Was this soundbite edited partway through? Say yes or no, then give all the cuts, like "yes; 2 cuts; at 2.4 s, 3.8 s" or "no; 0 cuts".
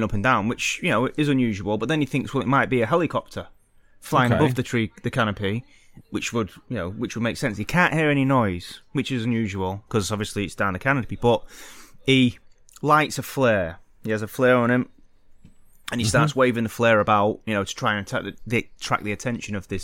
yes; 1 cut; at 6.0 s